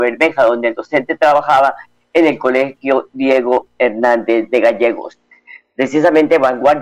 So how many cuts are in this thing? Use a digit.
0